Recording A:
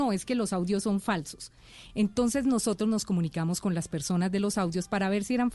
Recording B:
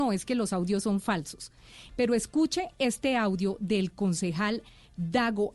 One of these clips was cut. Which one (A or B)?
B